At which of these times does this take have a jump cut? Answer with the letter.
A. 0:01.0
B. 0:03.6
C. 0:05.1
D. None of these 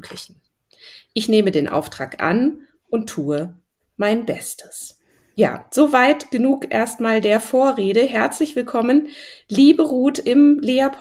D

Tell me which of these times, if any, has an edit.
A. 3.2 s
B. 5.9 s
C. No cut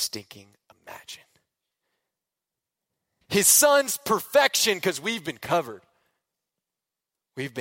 A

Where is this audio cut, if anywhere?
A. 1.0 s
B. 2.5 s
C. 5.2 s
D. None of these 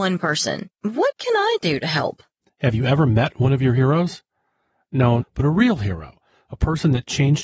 C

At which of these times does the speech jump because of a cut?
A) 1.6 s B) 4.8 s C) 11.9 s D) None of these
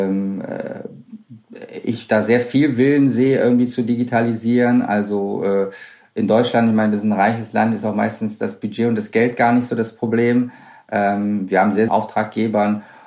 C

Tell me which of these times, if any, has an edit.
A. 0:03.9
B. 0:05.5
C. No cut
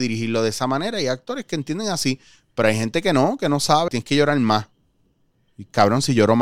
A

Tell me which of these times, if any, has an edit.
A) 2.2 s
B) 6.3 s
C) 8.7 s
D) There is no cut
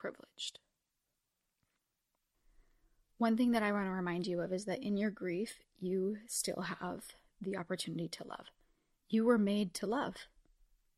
D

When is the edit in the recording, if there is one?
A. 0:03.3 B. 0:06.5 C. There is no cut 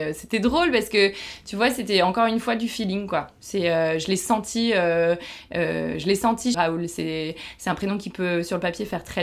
B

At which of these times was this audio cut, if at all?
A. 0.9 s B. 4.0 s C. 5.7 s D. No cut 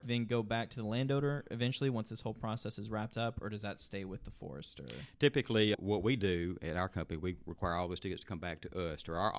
C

